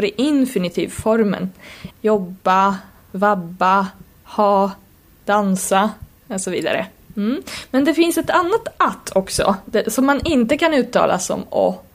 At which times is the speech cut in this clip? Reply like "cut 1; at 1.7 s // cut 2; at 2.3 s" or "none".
cut 1; at 1.9 s